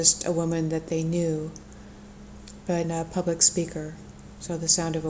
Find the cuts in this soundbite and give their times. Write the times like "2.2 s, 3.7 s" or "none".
2.8 s